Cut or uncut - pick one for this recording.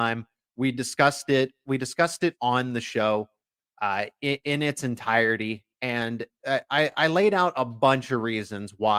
uncut